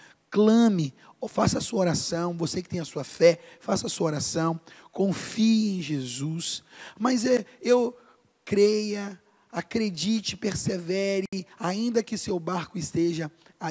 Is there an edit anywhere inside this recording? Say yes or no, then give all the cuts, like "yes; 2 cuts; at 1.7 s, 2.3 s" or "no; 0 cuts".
no; 0 cuts